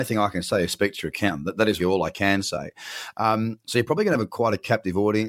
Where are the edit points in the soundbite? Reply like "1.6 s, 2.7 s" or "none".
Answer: 1.8 s